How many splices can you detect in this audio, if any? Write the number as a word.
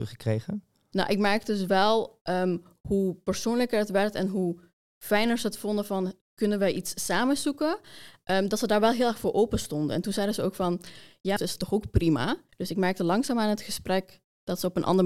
two